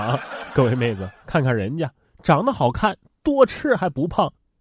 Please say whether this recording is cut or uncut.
uncut